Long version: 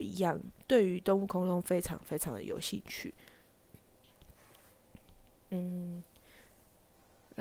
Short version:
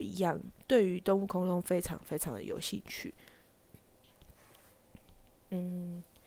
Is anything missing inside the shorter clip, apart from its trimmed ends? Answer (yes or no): no